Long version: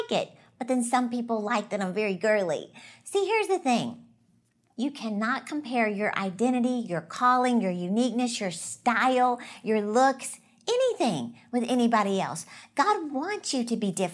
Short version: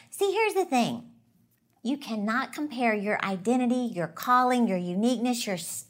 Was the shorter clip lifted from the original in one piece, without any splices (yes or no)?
yes